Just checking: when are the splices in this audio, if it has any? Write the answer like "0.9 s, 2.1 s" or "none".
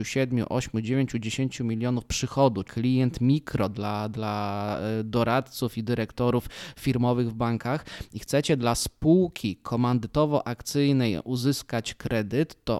2.6 s